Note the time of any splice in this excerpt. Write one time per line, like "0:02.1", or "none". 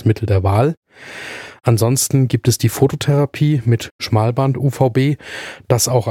none